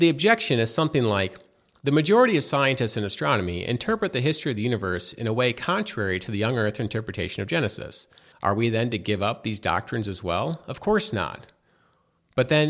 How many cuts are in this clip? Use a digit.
1